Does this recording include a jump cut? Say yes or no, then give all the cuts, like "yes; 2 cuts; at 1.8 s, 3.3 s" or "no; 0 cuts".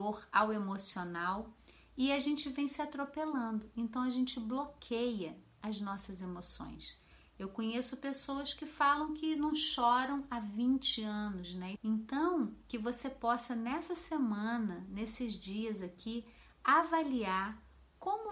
yes; 1 cut; at 11.8 s